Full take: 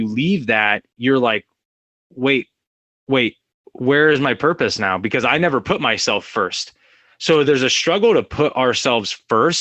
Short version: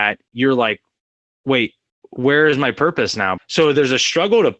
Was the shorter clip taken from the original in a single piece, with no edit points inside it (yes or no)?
no